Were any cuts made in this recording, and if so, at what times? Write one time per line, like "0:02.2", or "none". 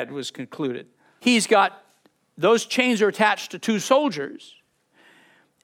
0:01.2